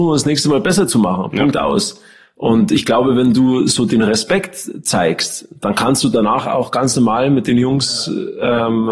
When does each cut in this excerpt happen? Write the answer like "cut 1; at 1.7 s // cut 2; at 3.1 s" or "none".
none